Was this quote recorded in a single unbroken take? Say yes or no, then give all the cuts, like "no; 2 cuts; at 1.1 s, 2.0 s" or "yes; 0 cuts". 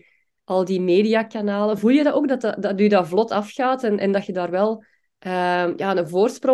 yes; 0 cuts